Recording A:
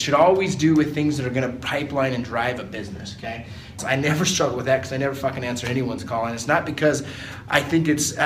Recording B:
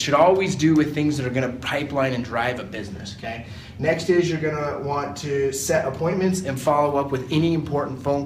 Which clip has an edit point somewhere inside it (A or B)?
A